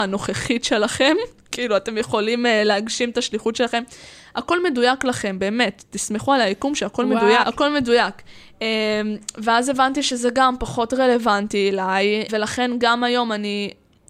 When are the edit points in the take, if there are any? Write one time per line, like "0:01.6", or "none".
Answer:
0:07.4
0:12.3